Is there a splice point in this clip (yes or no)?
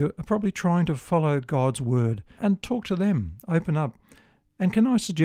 yes